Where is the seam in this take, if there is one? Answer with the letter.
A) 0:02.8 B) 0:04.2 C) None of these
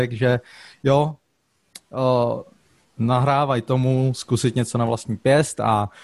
A